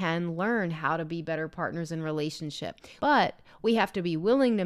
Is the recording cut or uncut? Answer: cut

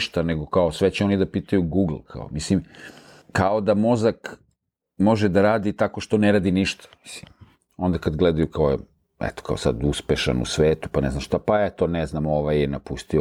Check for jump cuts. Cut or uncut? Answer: uncut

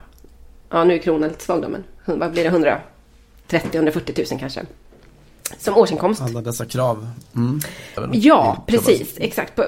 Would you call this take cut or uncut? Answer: cut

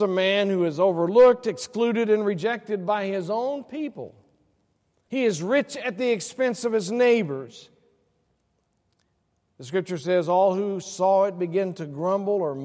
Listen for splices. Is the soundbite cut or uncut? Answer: cut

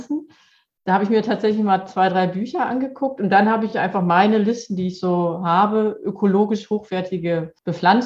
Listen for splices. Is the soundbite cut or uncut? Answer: uncut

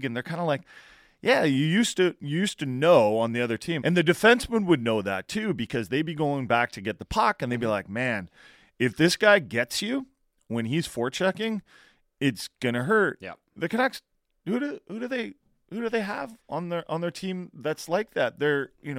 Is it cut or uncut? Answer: cut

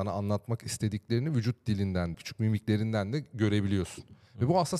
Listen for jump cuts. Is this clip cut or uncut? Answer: cut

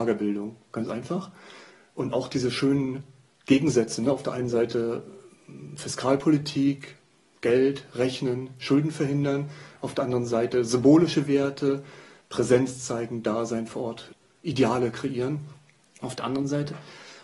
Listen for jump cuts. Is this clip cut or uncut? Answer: uncut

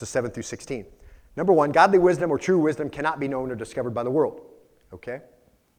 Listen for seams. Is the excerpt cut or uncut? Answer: uncut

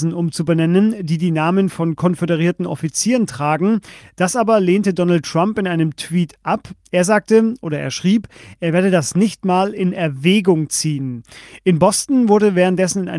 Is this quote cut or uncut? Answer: uncut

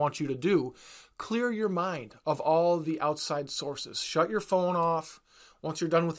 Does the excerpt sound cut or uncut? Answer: uncut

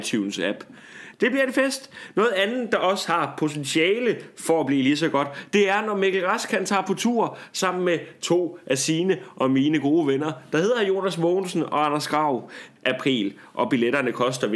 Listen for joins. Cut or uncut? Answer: cut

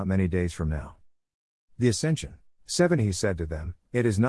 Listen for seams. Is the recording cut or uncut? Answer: cut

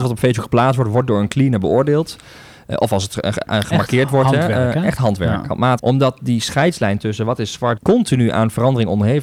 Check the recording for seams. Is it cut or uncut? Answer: cut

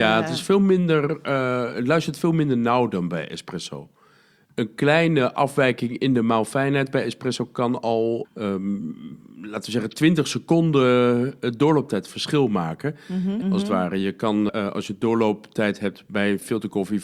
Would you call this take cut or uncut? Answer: cut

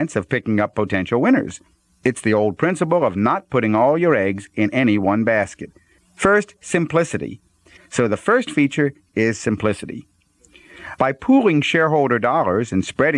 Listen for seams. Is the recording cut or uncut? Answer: cut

